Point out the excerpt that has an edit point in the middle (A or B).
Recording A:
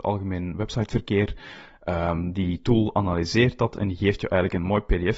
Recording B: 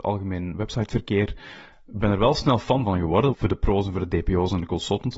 B